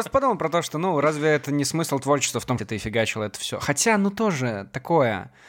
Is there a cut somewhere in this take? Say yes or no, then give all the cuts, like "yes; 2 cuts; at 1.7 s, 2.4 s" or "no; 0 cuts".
yes; 1 cut; at 2.6 s